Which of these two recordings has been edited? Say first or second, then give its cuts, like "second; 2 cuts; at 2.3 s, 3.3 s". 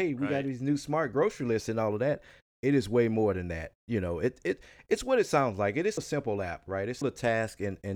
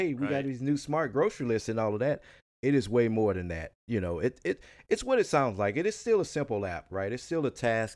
first; 2 cuts; at 6.0 s, 7.0 s